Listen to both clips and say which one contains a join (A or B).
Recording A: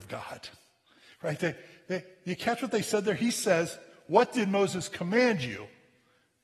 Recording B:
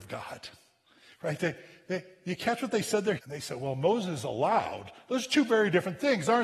B